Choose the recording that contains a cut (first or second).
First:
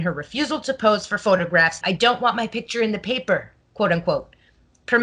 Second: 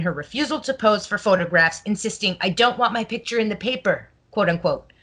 first